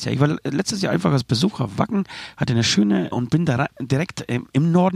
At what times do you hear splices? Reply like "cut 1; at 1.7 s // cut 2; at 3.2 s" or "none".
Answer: cut 1; at 3.1 s